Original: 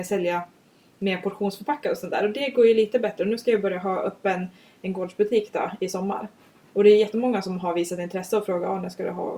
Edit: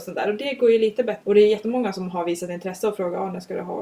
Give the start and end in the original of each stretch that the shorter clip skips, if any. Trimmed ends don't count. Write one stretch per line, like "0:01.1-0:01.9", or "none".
0:03.2-0:06.7